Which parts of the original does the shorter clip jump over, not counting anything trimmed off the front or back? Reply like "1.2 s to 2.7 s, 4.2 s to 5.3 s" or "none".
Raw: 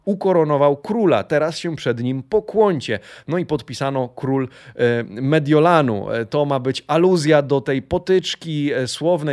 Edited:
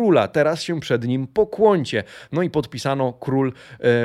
none